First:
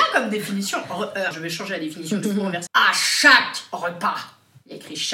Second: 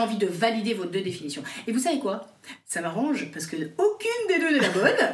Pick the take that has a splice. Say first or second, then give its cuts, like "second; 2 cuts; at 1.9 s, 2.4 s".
first; 2 cuts; at 1.3 s, 2.7 s